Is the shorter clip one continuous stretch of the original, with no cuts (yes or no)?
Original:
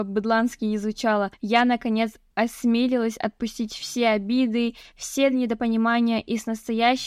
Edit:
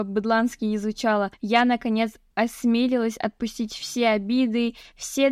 yes